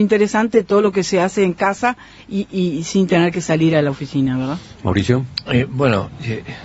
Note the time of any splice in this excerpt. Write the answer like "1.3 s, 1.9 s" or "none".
none

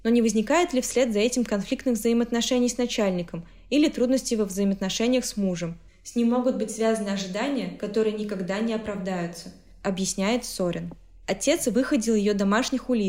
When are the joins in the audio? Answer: 5.9 s, 11.2 s

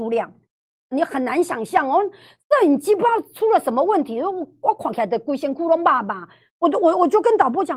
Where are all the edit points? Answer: 0.9 s

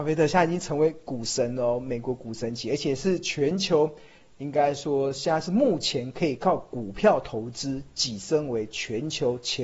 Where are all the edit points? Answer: none

